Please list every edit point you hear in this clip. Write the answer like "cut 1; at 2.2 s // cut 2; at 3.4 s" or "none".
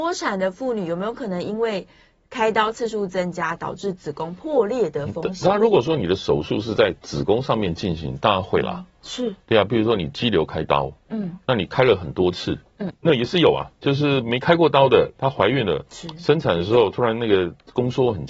cut 1; at 12.9 s